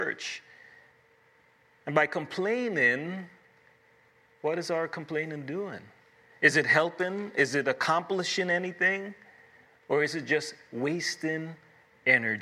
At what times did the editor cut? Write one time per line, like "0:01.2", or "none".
none